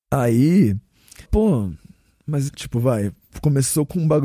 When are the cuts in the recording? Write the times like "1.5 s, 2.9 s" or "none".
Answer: 1.2 s, 2.5 s